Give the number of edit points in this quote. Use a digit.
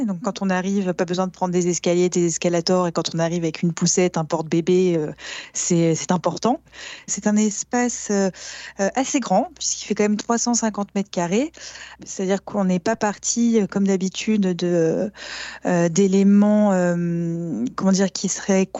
1